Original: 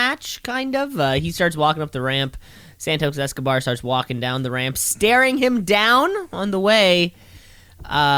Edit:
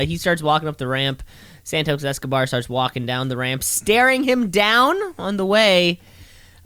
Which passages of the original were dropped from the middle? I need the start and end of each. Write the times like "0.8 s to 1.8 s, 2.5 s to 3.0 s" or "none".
none